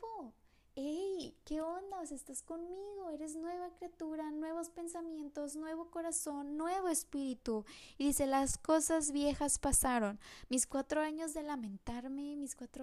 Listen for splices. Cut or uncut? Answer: uncut